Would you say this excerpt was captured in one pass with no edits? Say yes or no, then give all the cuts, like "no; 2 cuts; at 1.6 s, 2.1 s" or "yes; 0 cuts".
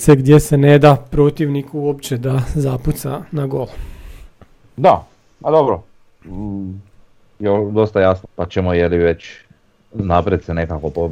no; 1 cut; at 8.2 s